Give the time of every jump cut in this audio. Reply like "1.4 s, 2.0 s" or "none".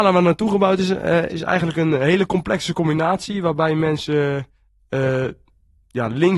1.3 s

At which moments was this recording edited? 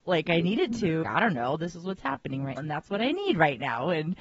1.0 s, 2.6 s

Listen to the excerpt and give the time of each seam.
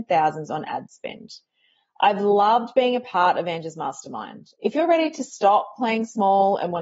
4.5 s

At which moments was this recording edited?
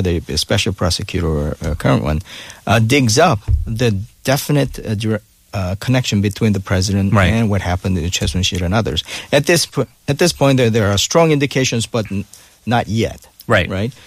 none

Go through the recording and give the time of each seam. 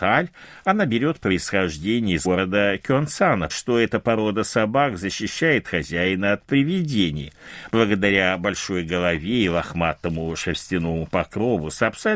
2.2 s, 3.5 s

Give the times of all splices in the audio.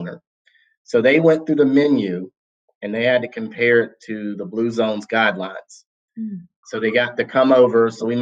6.6 s

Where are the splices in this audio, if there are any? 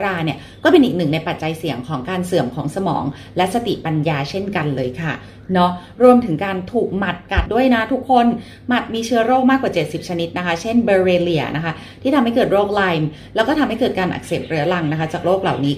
7.5 s

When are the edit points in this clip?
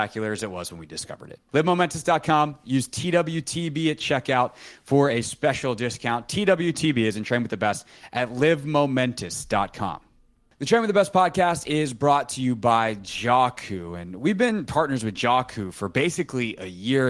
1.5 s

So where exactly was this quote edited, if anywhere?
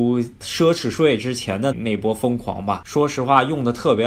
1.7 s

